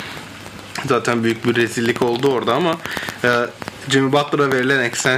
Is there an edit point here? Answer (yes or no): no